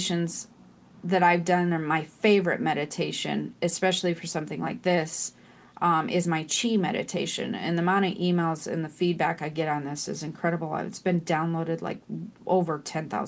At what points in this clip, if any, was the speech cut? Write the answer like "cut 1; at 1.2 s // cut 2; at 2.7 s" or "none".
none